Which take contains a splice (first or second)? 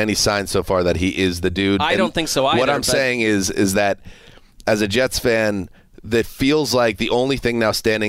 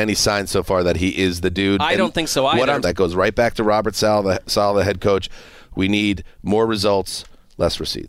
second